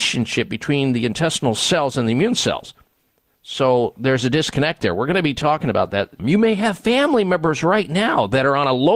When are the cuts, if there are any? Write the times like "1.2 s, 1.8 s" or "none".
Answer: 6.2 s